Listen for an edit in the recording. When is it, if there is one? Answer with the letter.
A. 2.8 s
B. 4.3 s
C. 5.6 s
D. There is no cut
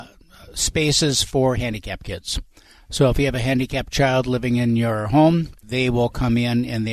C